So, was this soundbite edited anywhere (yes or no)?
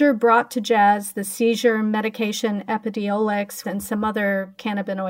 yes